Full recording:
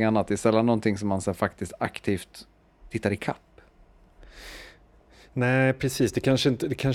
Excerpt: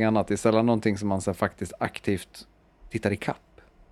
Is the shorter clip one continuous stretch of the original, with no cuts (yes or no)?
yes